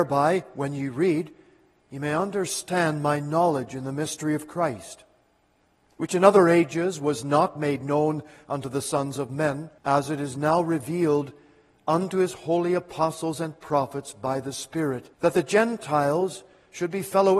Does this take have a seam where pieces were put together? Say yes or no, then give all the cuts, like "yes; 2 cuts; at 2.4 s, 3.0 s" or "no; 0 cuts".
yes; 2 cuts; at 9.8 s, 15.1 s